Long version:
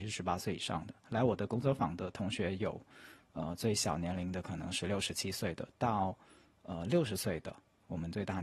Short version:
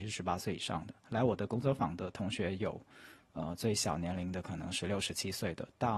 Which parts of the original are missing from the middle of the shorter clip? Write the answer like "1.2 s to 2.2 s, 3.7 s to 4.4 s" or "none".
none